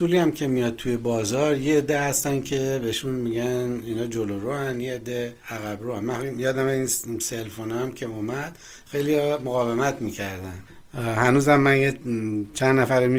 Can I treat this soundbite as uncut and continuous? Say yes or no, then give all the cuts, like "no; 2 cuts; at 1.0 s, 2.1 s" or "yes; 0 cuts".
no; 1 cut; at 5.4 s